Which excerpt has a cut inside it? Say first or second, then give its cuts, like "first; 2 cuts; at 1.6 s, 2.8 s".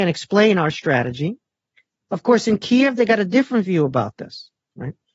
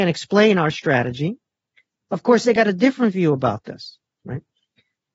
second; 1 cut; at 2.4 s